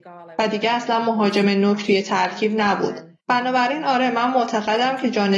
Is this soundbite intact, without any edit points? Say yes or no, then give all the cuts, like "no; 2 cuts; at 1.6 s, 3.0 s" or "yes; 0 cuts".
no; 1 cut; at 3.2 s